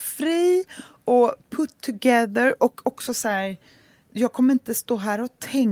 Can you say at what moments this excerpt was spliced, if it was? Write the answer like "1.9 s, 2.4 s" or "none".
none